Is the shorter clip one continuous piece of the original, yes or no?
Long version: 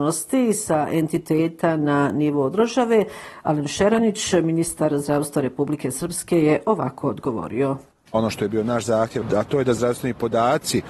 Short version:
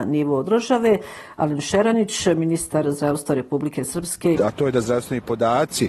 no